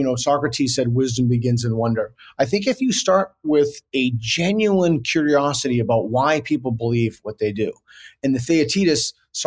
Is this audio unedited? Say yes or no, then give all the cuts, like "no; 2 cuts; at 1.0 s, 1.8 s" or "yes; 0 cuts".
yes; 0 cuts